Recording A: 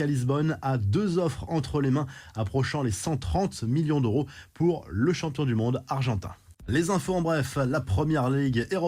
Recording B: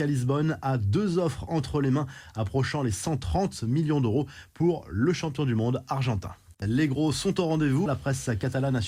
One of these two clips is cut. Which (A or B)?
B